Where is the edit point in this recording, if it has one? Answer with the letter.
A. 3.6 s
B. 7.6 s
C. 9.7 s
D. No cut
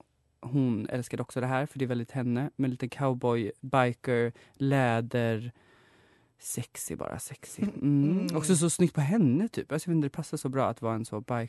A